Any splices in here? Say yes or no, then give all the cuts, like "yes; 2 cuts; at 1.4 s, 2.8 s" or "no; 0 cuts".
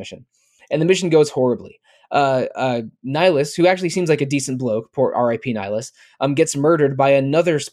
no; 0 cuts